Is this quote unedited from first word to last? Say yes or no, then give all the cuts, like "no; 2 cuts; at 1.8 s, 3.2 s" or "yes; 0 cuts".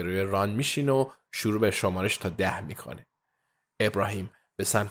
yes; 0 cuts